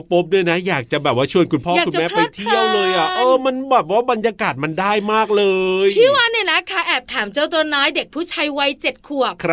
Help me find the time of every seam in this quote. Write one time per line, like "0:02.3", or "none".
none